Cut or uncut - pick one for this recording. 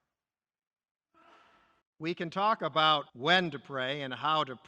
cut